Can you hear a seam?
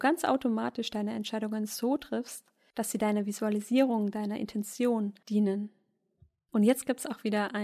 no; 0 cuts

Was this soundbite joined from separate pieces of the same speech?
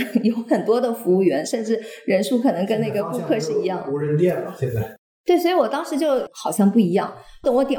no; 0 cuts

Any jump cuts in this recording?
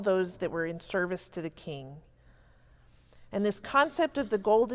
no; 0 cuts

